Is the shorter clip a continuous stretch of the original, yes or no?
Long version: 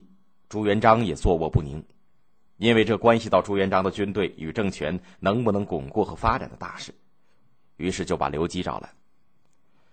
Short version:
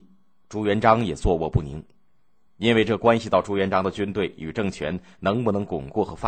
yes